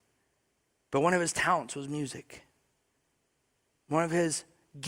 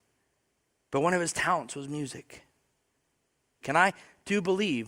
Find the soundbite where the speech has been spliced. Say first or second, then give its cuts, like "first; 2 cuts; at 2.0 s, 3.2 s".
second; 1 cut; at 3.6 s